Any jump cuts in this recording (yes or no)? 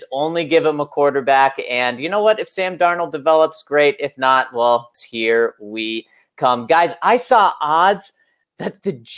yes